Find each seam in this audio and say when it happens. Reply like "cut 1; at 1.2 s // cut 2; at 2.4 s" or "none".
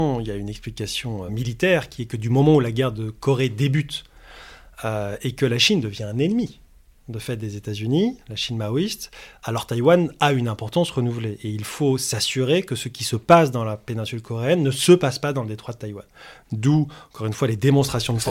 cut 1; at 1.3 s